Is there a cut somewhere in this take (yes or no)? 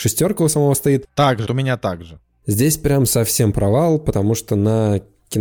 yes